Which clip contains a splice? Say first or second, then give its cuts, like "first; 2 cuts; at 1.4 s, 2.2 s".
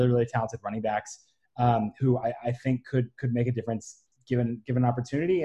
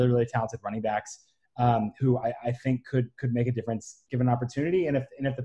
second; 1 cut; at 4.1 s